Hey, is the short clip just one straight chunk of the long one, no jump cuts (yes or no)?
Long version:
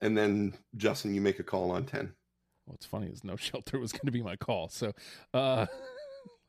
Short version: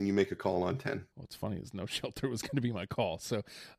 no